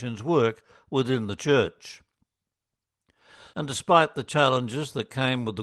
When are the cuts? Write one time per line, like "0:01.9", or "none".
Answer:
0:03.5